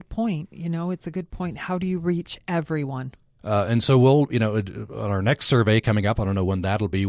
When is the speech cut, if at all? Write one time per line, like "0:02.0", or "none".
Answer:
0:03.4